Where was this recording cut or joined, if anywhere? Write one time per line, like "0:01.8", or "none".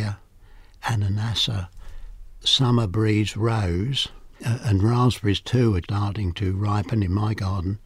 0:04.3
0:05.8